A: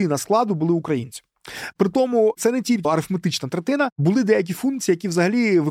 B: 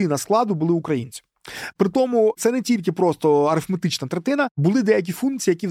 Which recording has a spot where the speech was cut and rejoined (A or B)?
A